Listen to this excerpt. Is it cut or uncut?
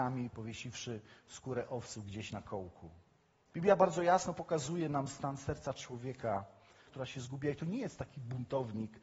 cut